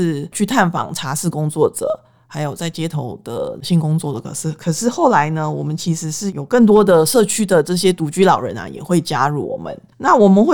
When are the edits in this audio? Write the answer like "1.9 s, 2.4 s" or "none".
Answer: none